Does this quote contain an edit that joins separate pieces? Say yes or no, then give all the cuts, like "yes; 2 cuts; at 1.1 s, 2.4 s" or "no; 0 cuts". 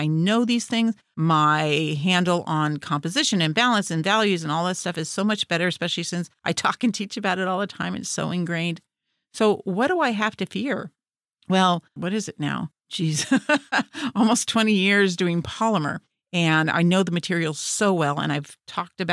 yes; 1 cut; at 12.0 s